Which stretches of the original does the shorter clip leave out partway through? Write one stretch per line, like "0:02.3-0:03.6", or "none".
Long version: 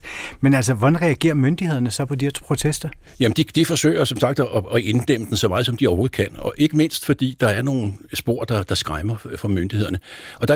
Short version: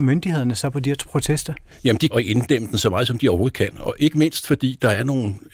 0:03.5-0:04.7